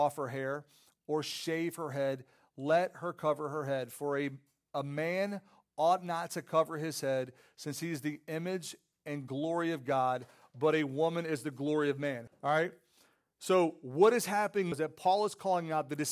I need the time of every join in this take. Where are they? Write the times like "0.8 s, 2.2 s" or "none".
12.3 s, 14.7 s